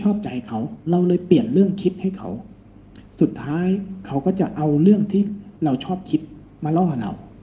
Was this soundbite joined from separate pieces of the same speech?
yes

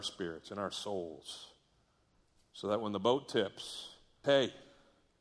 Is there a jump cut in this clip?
yes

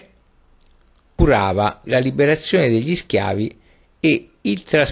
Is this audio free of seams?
no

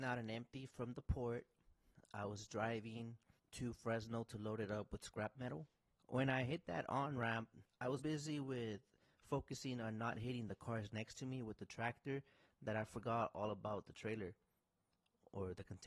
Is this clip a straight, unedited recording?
no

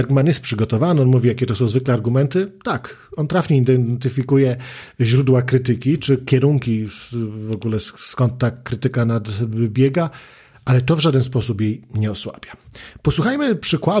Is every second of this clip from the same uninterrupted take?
yes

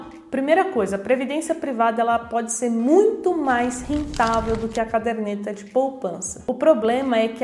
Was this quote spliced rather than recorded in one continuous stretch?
no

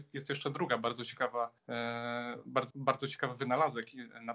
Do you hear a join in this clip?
yes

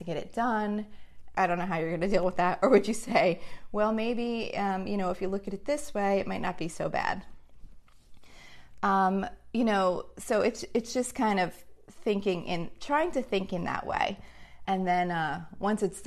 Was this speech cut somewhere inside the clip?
yes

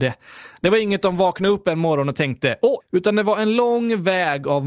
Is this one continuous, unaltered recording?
no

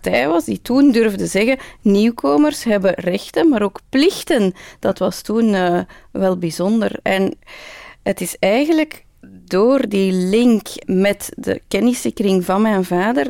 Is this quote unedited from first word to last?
no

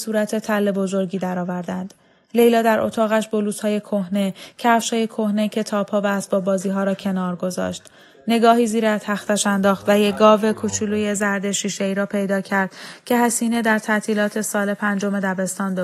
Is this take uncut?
yes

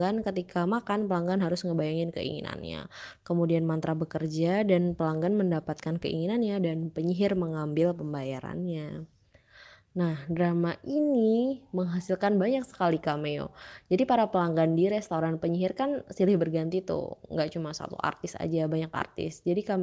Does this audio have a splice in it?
no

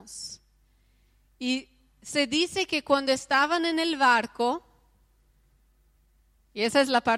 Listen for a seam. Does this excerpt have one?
no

